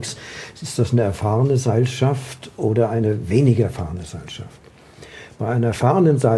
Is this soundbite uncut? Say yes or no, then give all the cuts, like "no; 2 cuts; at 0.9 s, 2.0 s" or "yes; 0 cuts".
yes; 0 cuts